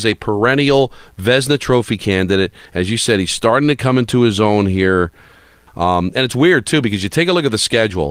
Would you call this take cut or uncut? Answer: cut